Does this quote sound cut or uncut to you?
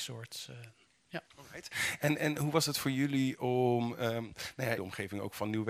cut